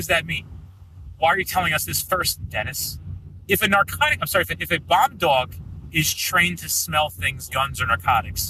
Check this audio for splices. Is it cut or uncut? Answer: cut